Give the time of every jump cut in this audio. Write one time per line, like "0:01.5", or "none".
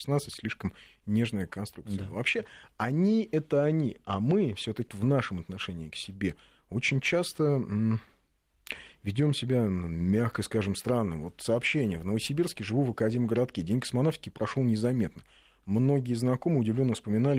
0:04.9

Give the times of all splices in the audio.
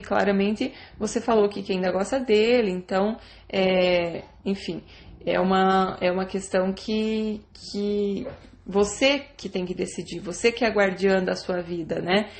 none

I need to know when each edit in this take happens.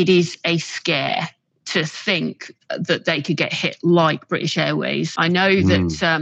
none

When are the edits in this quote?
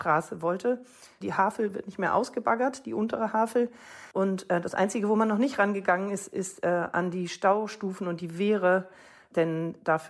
0:04.1

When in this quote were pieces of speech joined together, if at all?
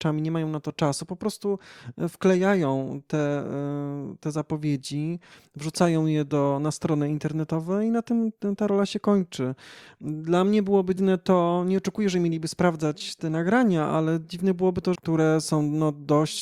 0:11.0
0:14.9

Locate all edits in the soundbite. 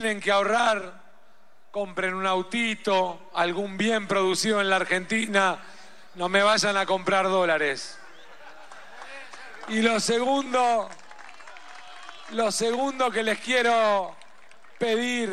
none

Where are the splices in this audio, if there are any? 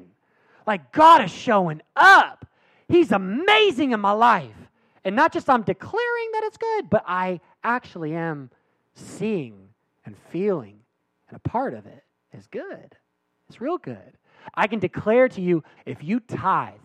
0:15.8

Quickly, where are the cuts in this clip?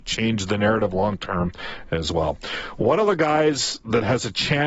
none

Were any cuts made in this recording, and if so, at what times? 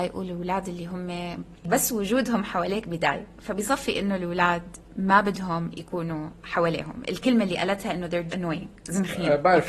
0:08.3

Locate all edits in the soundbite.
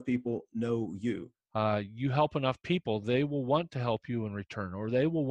0:01.3

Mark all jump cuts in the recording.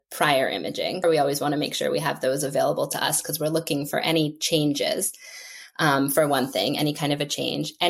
0:01.0

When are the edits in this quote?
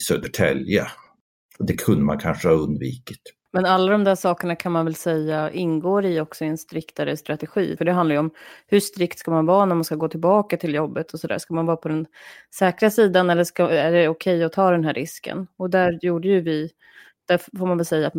0:07.8

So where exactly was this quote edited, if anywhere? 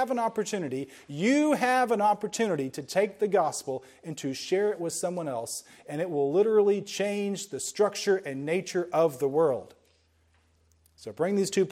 none

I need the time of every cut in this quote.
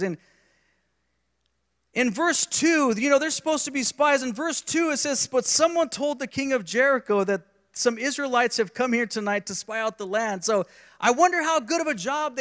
none

